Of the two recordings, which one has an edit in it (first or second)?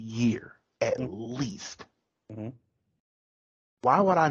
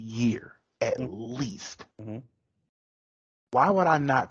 second